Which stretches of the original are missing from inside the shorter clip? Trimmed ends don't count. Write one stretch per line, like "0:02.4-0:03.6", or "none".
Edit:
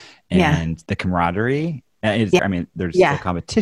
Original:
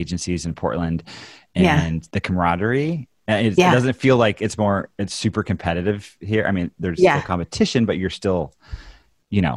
0:03.6-0:06.4